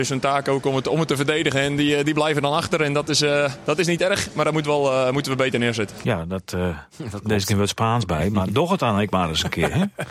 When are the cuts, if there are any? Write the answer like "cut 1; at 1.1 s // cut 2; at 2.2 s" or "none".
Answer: none